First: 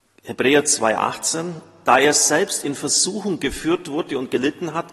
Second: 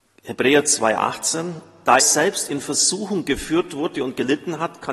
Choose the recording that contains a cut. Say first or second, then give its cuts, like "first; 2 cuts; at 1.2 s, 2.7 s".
second; 1 cut; at 2.0 s